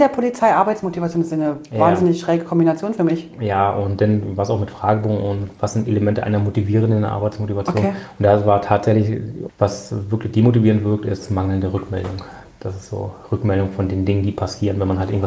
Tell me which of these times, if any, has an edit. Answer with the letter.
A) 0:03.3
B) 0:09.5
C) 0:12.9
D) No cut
B